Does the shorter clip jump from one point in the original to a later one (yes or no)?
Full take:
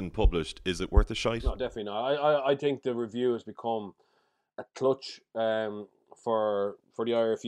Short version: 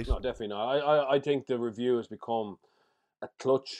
no